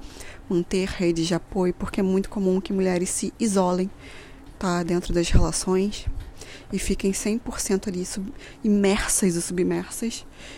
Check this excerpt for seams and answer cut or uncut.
uncut